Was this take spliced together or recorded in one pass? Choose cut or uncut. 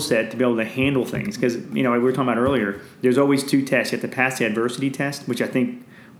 uncut